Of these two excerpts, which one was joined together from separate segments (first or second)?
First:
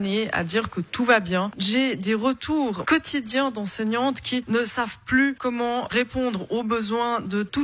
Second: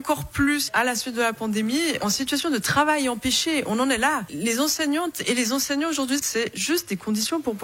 second